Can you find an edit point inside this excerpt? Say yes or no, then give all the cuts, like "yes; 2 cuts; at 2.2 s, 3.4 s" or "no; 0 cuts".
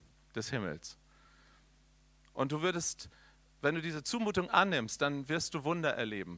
no; 0 cuts